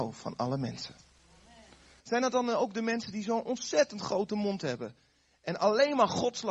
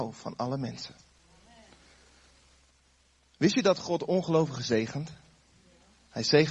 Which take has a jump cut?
first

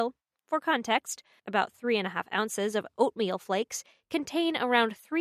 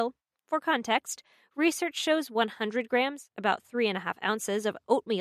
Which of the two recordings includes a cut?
first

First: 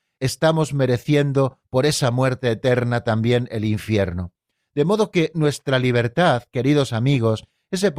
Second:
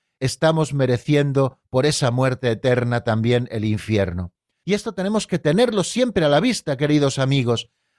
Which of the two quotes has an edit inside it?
second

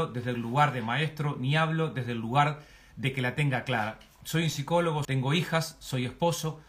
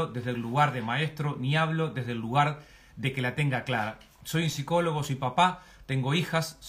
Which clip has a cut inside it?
first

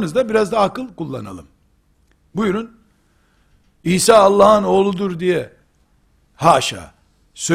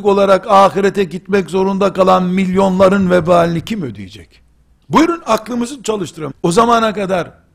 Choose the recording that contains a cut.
second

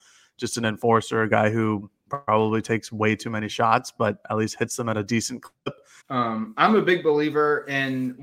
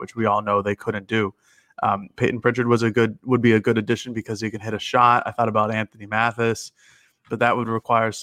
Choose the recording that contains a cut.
first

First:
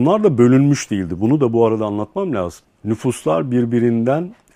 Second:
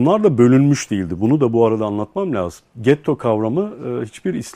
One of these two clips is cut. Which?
first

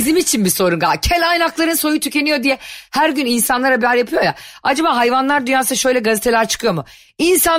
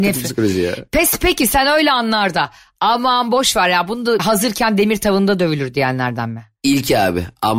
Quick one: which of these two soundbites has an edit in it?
second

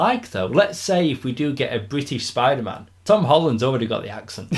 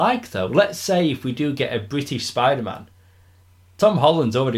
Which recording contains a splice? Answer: first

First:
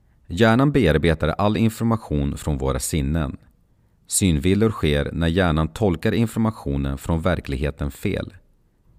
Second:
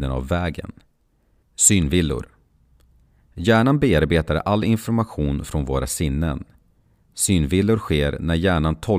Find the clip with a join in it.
second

